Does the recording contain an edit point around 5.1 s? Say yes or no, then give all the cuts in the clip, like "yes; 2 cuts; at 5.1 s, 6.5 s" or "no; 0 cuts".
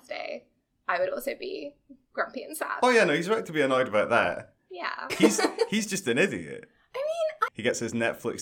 yes; 2 cuts; at 5.1 s, 7.5 s